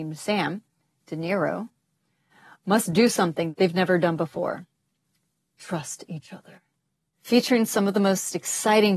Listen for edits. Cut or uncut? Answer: uncut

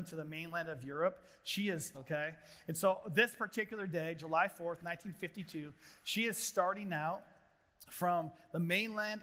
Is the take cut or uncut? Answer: cut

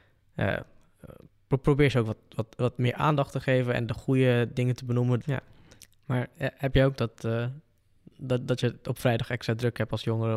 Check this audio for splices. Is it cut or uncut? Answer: cut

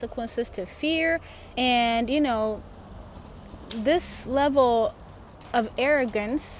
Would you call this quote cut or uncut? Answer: cut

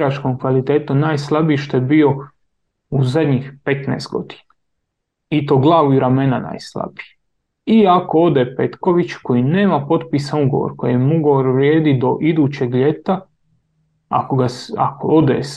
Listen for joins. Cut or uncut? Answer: uncut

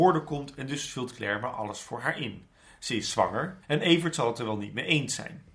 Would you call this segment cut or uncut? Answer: cut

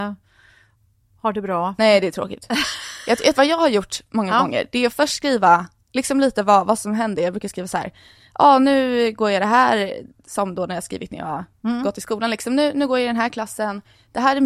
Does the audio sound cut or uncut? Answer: cut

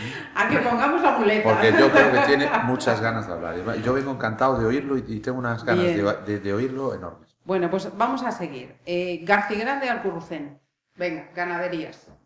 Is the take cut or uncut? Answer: uncut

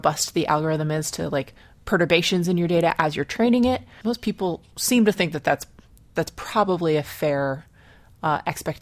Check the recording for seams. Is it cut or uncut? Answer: cut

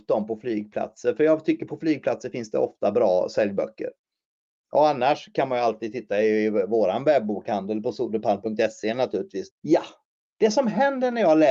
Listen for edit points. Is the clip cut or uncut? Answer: cut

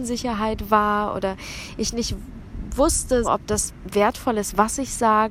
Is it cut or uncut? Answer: cut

